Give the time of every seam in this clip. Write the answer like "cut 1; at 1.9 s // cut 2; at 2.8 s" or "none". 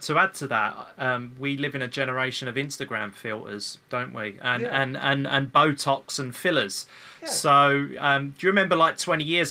none